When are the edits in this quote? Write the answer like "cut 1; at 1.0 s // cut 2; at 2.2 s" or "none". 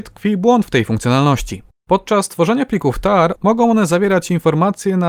cut 1; at 3.4 s